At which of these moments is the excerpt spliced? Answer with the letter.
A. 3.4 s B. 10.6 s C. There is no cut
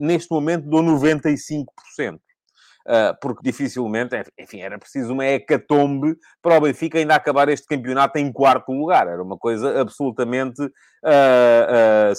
A